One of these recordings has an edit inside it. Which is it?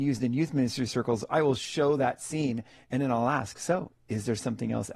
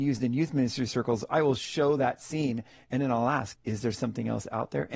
second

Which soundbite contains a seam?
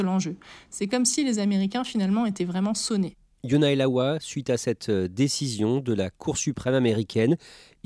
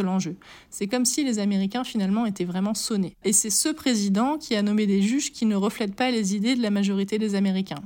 second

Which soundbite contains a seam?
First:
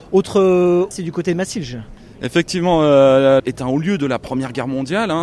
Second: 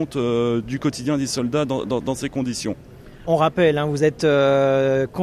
first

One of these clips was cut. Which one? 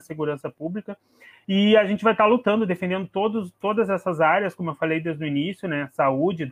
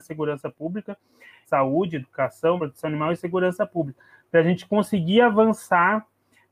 second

